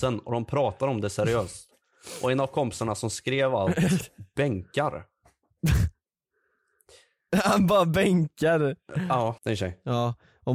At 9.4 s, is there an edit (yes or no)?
yes